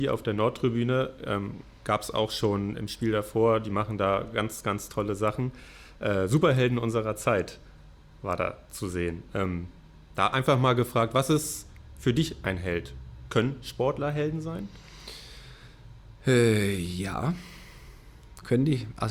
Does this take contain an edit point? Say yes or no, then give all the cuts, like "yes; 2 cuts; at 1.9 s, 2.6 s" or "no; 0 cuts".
no; 0 cuts